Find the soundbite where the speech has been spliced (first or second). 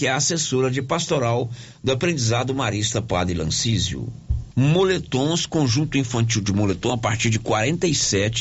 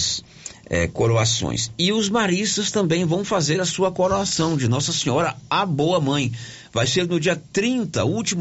first